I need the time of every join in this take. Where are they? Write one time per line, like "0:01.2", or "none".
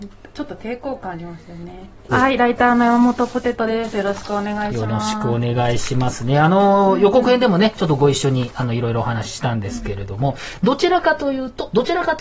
0:02.1